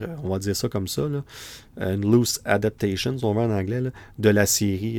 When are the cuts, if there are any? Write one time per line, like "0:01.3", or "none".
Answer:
none